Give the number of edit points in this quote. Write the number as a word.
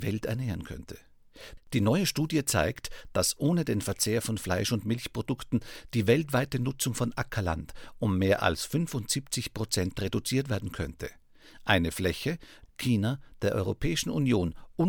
two